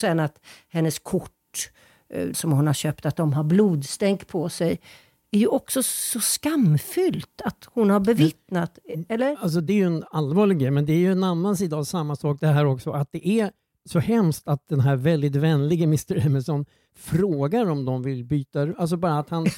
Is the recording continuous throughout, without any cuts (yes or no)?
no